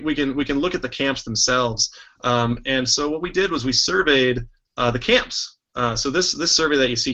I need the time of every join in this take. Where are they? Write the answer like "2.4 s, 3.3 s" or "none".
none